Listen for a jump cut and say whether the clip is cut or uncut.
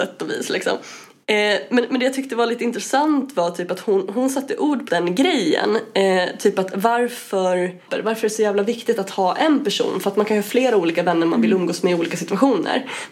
cut